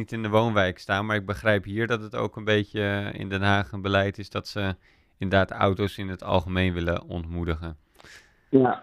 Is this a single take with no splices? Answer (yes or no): yes